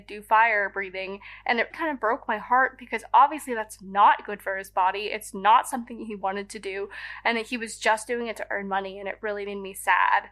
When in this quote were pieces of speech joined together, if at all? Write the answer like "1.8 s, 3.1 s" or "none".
1.7 s